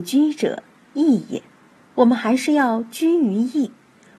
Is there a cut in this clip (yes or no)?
no